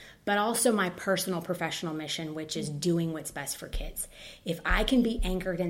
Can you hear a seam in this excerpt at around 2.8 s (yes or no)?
no